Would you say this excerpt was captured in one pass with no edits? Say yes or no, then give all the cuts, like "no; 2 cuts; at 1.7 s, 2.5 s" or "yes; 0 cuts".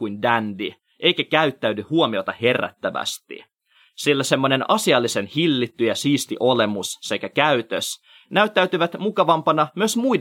yes; 0 cuts